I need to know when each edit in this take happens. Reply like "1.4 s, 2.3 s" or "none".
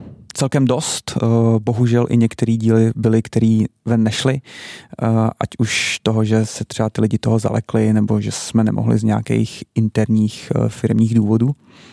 none